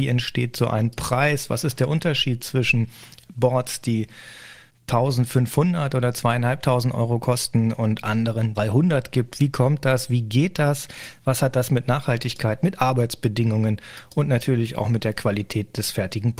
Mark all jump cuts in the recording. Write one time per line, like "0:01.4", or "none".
0:08.5